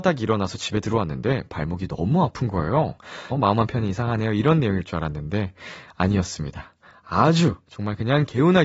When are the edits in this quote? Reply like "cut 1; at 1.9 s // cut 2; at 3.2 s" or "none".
cut 1; at 3.3 s